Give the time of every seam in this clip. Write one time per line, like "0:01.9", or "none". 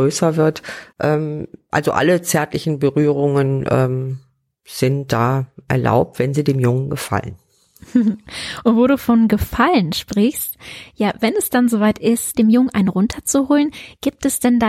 0:00.9
0:12.3